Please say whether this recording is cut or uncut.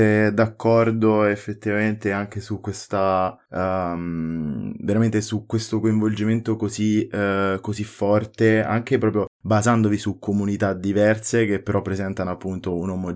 cut